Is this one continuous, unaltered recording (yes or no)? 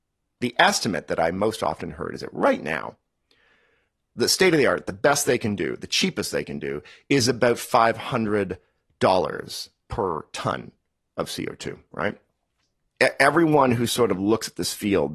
yes